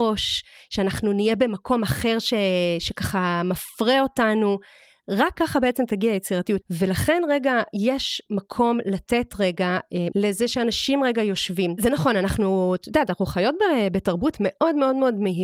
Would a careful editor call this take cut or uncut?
cut